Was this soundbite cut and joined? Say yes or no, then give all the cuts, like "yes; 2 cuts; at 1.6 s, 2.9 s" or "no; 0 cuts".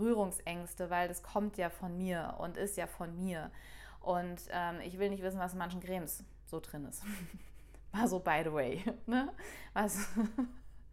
no; 0 cuts